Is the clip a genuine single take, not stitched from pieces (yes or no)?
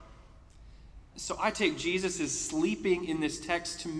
yes